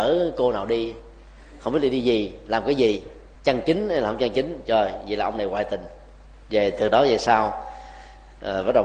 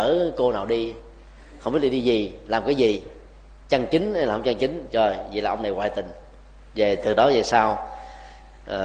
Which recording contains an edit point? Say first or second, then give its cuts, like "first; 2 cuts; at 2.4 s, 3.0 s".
first; 1 cut; at 3.4 s